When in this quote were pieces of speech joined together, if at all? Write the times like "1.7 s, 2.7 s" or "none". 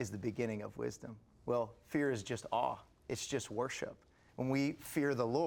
4.3 s